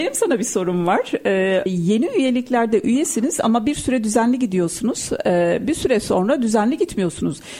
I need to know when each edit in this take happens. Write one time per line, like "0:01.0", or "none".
0:01.7